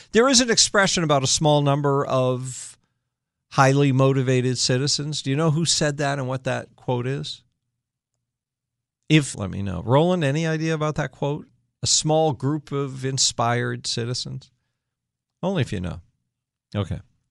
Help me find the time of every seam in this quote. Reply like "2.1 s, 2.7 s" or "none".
9.3 s